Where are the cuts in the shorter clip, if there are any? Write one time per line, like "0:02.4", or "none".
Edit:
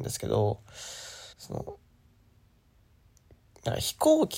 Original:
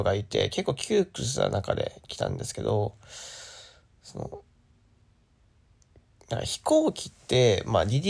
0:01.3